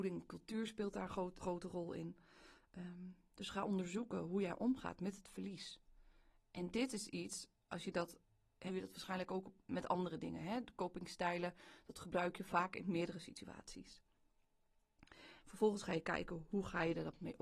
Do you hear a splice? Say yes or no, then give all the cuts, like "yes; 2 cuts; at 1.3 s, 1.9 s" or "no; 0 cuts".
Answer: yes; 3 cuts; at 1.4 s, 8.7 s, 15.4 s